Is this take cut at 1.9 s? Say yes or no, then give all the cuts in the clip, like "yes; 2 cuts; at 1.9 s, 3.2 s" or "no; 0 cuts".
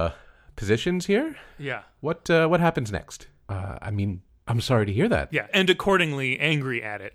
no; 1 cut; at 3.4 s